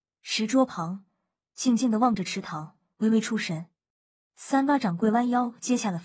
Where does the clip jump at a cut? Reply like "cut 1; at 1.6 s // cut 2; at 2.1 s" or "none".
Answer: cut 1; at 1.4 s // cut 2; at 4.3 s